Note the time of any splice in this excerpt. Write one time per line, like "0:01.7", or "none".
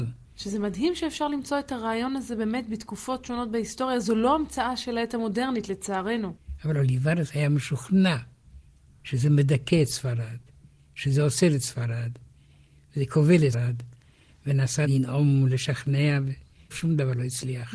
0:13.5